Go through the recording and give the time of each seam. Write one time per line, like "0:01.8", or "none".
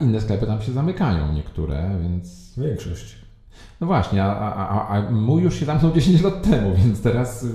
none